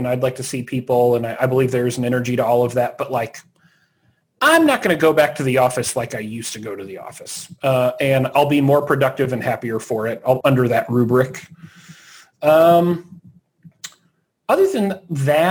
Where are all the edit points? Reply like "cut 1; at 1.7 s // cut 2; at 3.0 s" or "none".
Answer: cut 1; at 10.4 s